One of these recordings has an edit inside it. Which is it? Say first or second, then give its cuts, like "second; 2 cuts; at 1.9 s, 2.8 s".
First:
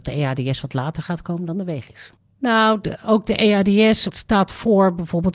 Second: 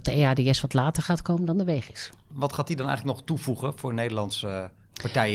first; 2 cuts; at 2.2 s, 4.1 s